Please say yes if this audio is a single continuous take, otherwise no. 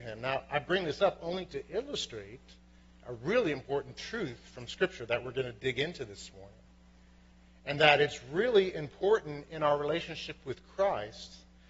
yes